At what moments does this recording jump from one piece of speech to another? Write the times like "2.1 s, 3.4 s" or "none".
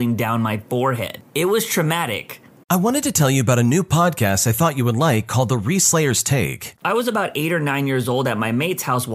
2.5 s, 6.8 s